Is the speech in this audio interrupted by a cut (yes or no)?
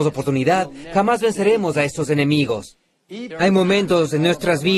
yes